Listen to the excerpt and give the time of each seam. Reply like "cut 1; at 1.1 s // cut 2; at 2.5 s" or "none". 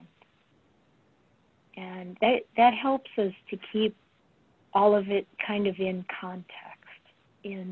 none